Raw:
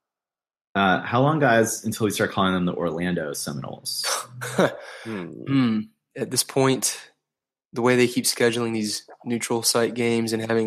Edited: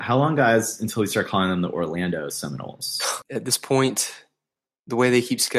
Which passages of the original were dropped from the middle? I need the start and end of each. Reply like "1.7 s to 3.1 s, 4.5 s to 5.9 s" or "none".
4.3 s to 6.1 s